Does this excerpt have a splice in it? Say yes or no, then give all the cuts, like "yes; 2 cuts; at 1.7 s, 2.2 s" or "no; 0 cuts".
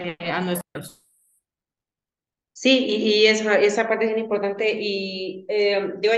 no; 0 cuts